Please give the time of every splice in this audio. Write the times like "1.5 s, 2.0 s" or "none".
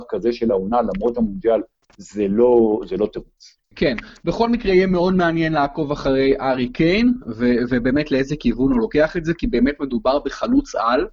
3.7 s